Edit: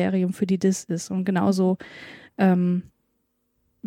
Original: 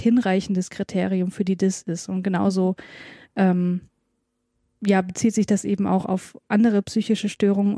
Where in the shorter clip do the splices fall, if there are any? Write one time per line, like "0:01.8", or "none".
none

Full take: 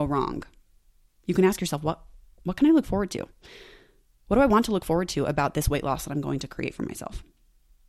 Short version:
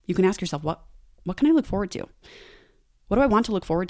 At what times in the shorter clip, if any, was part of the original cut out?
none

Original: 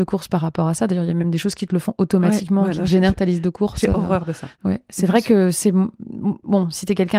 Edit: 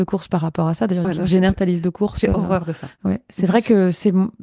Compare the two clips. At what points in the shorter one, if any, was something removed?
0:01.0

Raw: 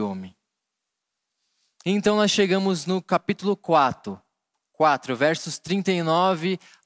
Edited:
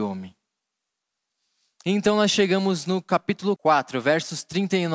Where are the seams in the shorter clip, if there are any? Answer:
0:03.6

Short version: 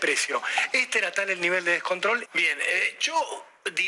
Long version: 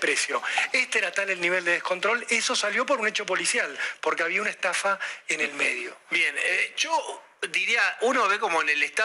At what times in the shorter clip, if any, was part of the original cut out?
0:02.3

